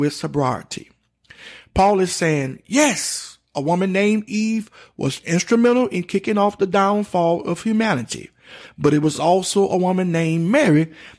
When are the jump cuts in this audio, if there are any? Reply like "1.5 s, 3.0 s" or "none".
none